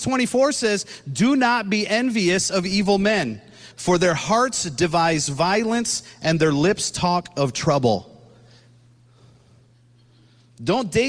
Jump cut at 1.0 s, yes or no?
no